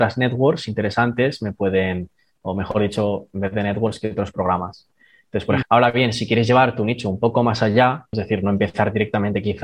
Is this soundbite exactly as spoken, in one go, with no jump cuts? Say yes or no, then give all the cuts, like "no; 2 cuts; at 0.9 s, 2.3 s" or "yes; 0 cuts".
no; 2 cuts; at 5.6 s, 8.1 s